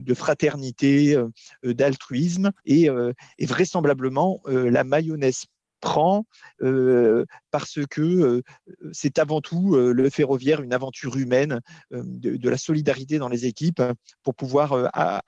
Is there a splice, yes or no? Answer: yes